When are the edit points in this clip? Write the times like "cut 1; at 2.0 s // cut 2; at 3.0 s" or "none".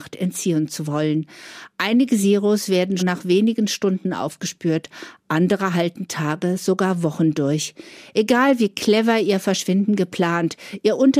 cut 1; at 3.0 s